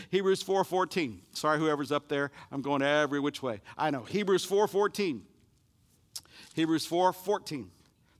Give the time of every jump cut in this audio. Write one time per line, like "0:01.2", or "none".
none